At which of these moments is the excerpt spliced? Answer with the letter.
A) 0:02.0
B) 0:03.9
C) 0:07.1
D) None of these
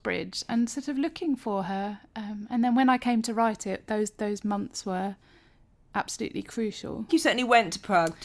C